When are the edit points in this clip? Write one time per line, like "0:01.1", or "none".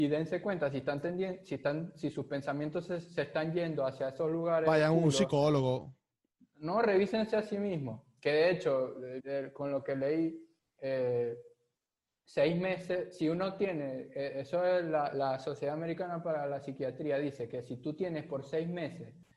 0:09.2